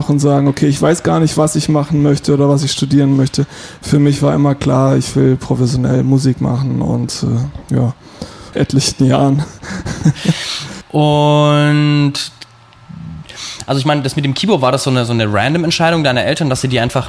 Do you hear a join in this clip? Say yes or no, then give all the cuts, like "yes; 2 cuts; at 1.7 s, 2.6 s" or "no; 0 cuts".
yes; 2 cuts; at 8.5 s, 10.8 s